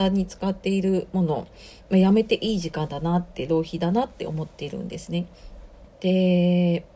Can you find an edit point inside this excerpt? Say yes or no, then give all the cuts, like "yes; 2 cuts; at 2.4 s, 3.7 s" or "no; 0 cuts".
yes; 1 cut; at 5.8 s